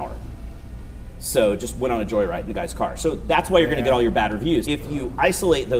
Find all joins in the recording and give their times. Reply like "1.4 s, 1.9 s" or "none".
4.6 s

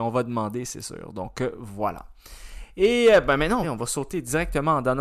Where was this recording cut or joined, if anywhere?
3.6 s

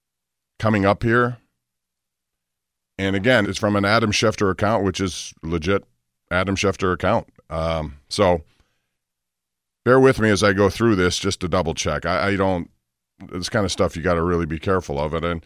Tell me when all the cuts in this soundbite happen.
3.4 s

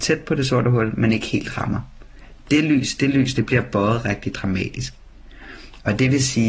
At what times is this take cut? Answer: 3.3 s

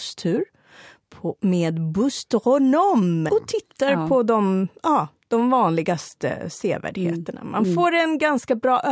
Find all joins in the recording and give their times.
3.3 s

